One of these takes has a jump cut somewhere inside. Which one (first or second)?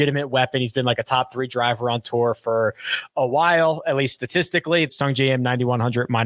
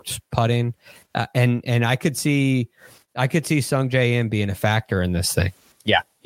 first